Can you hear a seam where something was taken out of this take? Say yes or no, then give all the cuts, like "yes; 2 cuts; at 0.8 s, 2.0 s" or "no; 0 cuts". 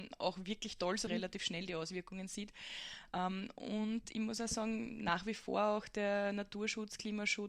yes; 1 cut; at 1.1 s